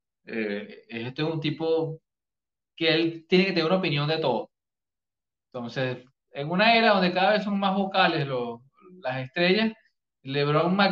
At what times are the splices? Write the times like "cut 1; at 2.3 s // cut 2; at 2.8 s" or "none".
none